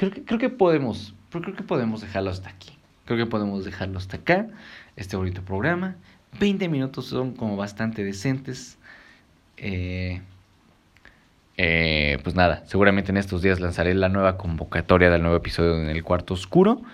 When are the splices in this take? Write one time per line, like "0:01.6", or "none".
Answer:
none